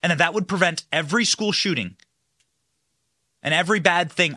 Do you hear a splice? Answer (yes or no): no